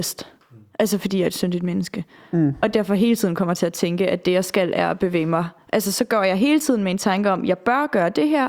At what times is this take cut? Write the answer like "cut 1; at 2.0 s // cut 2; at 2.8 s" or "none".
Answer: none